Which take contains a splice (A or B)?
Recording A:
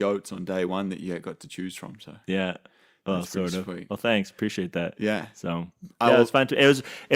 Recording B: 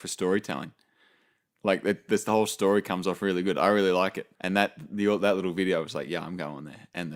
B